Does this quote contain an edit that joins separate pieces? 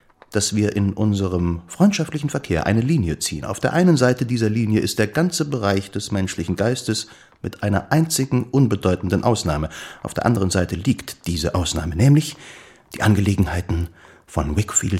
no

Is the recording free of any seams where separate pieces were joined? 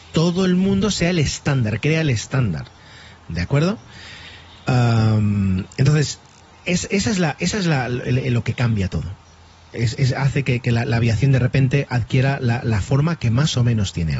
yes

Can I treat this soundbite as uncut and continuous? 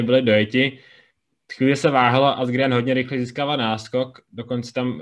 yes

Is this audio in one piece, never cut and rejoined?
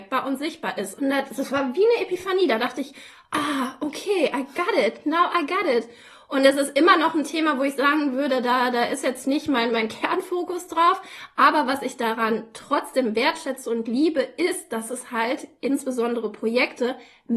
no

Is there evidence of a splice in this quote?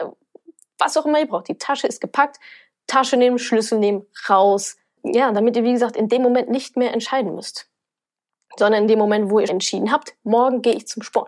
yes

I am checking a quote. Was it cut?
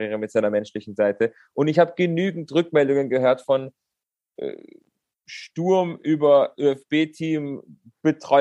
no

